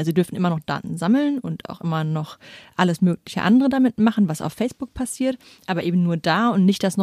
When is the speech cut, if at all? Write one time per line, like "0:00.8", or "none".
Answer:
none